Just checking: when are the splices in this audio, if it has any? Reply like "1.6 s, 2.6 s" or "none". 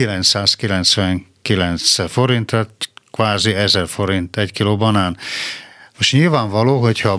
5.9 s